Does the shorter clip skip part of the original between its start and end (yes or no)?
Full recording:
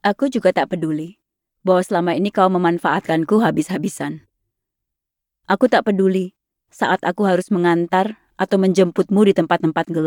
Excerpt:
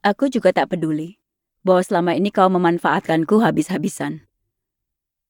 no